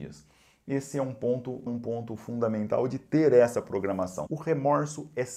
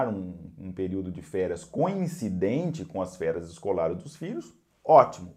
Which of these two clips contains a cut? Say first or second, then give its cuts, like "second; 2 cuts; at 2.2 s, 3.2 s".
first; 2 cuts; at 1.7 s, 4.3 s